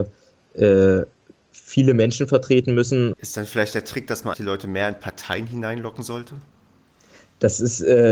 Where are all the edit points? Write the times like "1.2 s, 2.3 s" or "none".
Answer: 3.1 s, 4.3 s